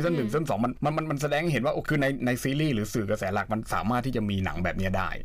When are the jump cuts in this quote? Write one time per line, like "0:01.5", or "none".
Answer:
0:01.9